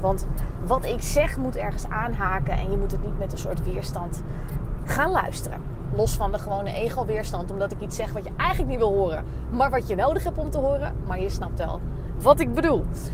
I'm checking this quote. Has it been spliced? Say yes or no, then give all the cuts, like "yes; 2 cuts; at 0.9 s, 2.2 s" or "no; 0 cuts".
no; 0 cuts